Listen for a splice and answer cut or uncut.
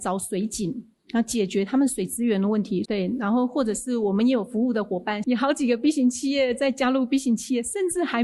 cut